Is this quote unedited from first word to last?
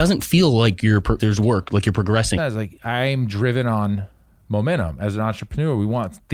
no; 2 cuts; at 1.2 s, 2.4 s

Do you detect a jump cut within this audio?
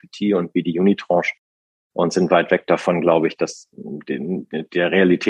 no; 0 cuts

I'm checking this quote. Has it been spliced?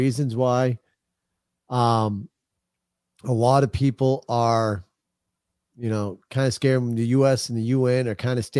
no; 0 cuts

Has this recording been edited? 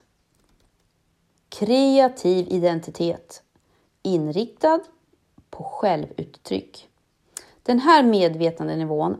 no; 0 cuts

